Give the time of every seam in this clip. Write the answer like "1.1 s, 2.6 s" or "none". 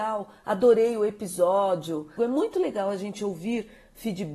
2.2 s